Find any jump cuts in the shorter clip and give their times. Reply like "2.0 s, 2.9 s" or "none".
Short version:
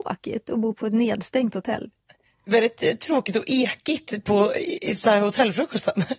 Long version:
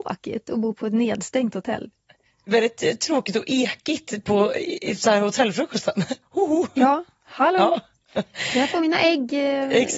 none